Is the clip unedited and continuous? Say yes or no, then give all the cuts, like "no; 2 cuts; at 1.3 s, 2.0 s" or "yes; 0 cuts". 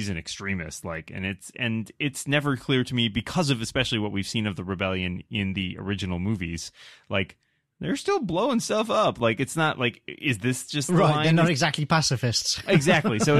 yes; 0 cuts